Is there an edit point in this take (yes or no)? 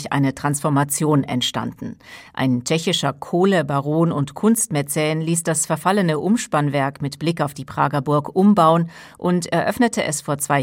no